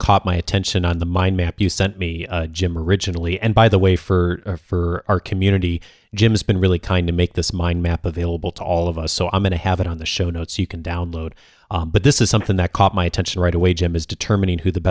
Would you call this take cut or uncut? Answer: uncut